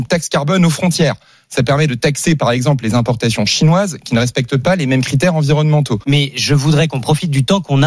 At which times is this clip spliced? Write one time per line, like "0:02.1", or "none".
0:06.0